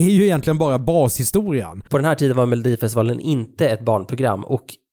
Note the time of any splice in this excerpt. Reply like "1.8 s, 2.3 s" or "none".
1.9 s

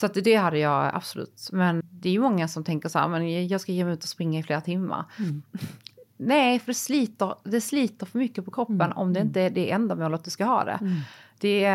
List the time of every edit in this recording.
1.8 s

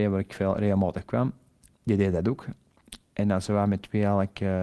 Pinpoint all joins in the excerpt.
none

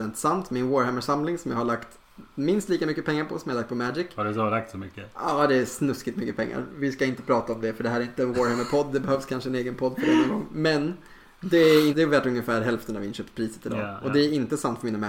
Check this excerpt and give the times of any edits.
11.9 s

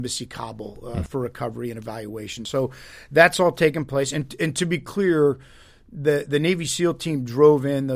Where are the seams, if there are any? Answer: none

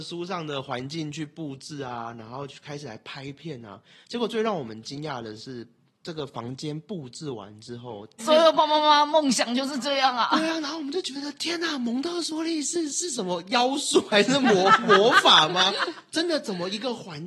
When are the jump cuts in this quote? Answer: 8.2 s

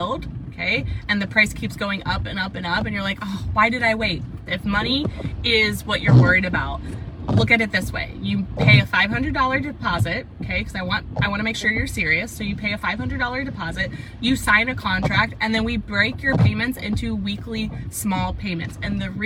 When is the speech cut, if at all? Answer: 4.5 s

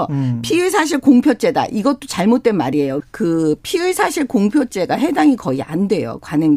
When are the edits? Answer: 3.0 s

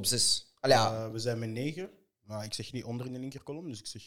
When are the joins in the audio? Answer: none

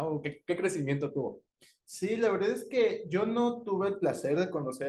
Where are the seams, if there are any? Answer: none

